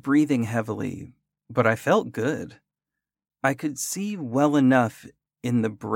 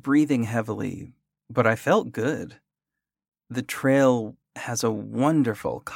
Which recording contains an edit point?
first; 1 cut; at 3.3 s

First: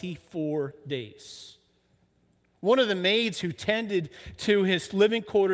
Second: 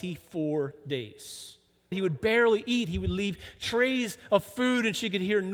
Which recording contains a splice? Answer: second; 1 cut; at 1.9 s

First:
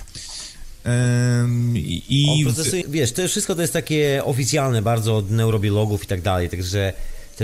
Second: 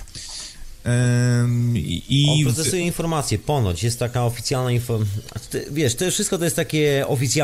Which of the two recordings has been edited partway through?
first; 1 cut; at 2.8 s

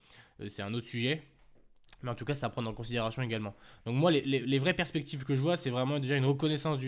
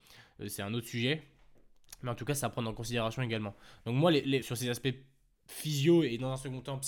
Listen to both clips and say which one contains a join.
second; 1 cut; at 4.4 s

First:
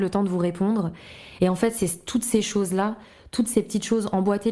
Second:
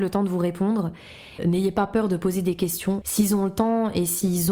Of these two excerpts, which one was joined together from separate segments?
second; 2 cuts; at 1.4 s, 3.0 s

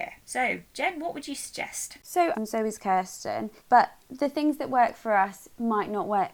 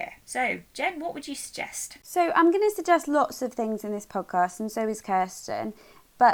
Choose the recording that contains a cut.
first; 2 cuts; at 2.3 s, 3.6 s

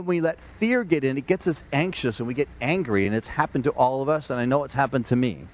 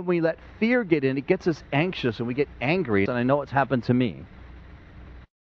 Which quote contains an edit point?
second; 1 cut; at 3.1 s

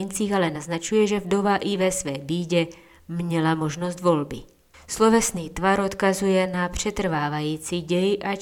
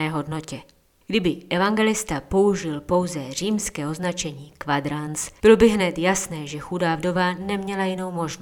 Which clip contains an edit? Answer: first; 1 cut; at 4.7 s

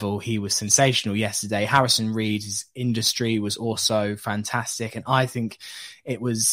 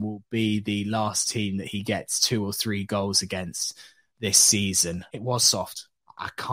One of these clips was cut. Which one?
second; 1 cut; at 5.1 s

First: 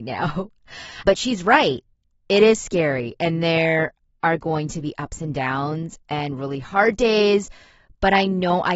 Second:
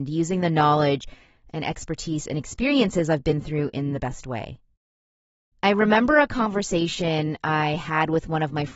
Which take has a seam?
first; 1 cut; at 1.0 s

